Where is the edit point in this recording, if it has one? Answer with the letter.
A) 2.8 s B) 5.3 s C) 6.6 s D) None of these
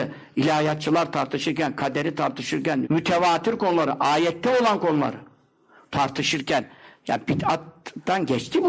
A